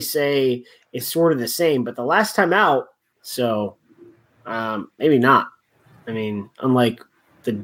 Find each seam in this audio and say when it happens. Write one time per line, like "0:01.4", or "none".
0:03.1